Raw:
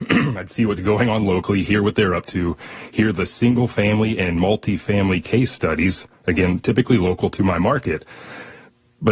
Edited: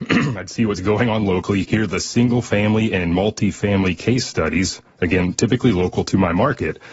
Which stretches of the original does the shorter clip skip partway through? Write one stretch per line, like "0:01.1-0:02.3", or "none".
0:01.6-0:02.9